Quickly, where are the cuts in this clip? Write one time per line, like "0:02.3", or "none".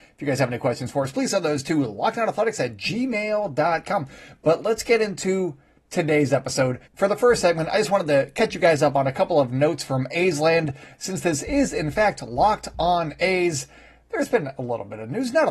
0:06.9